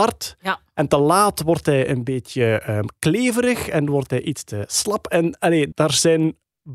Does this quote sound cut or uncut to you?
cut